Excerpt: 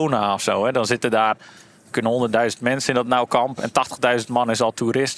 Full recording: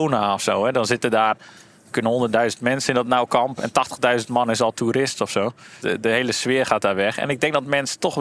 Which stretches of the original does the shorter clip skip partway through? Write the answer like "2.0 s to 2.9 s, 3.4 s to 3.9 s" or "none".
none